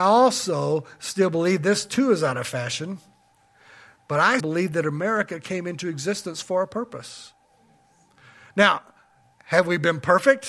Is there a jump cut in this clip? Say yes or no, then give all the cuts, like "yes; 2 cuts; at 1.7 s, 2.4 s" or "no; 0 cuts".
yes; 1 cut; at 4.4 s